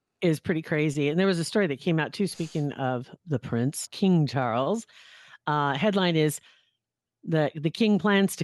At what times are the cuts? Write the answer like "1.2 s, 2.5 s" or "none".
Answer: 3.9 s

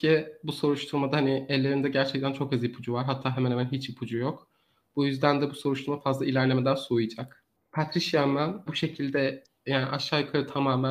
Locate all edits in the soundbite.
8.7 s

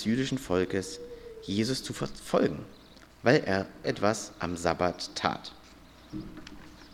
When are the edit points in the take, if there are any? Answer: 3.8 s

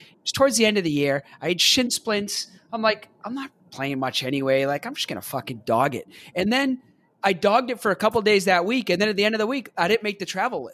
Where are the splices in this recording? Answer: 3.6 s

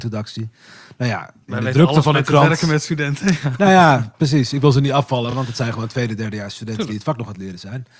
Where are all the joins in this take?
none

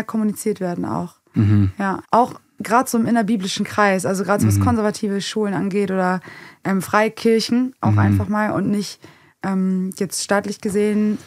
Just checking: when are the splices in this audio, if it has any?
2.0 s

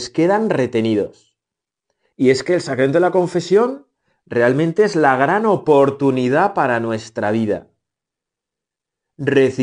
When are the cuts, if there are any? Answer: 2.1 s

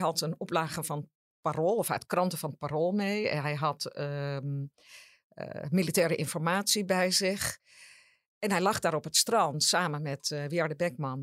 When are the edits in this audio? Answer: none

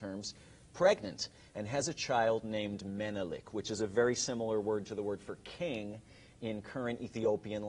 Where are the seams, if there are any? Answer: none

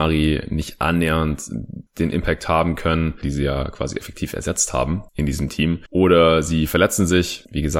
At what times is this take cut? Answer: 3.2 s, 5.9 s

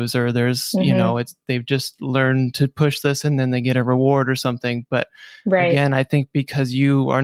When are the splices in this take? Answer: none

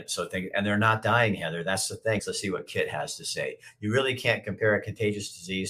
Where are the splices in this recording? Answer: 2.2 s

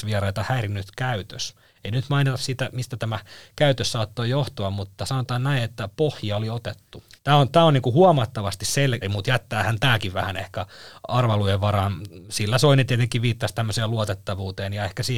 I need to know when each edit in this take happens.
7.2 s, 9.0 s

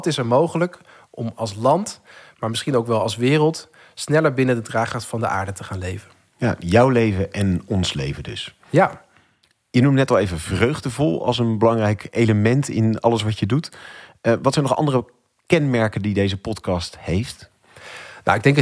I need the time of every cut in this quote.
none

